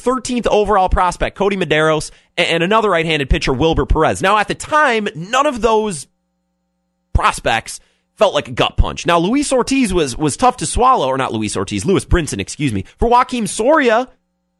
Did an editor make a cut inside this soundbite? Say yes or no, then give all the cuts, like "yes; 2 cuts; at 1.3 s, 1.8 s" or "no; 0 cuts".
yes; 1 cut; at 12.9 s